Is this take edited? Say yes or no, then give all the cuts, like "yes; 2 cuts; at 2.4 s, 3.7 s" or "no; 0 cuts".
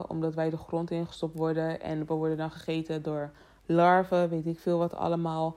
no; 0 cuts